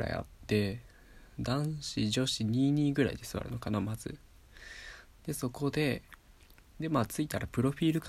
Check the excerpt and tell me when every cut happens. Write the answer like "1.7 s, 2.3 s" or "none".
none